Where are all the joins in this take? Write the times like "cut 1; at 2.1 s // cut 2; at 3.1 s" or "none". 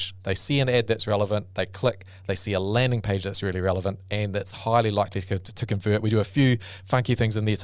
none